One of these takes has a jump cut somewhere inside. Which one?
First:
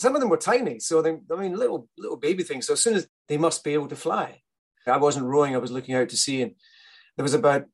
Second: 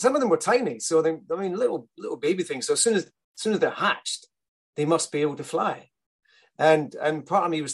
first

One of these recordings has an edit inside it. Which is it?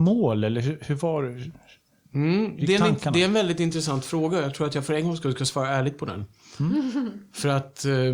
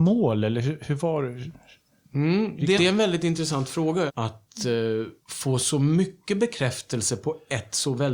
second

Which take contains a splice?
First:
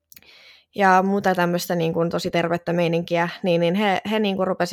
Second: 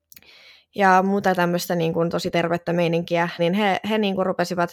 second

